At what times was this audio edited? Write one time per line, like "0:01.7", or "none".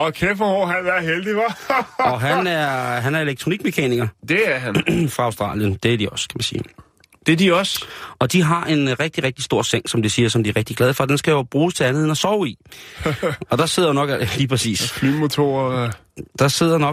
none